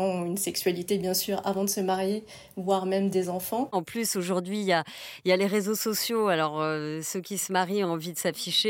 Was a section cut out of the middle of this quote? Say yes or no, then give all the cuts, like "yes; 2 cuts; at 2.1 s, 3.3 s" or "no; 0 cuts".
yes; 1 cut; at 3.7 s